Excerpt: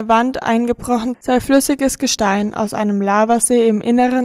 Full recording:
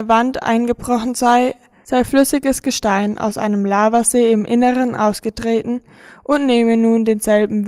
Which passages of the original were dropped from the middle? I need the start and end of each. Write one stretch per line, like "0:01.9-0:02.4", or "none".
0:01.1-0:01.8